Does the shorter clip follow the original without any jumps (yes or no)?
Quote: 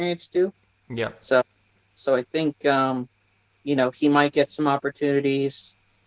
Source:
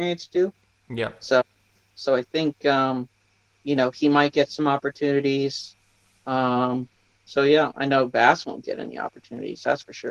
yes